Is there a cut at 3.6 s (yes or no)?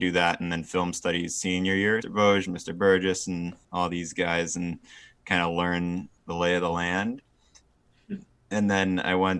yes